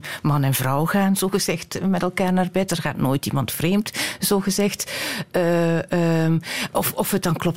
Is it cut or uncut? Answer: uncut